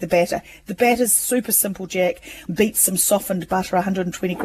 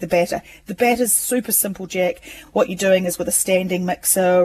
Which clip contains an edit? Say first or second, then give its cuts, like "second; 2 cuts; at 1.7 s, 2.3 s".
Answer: first; 1 cut; at 2.5 s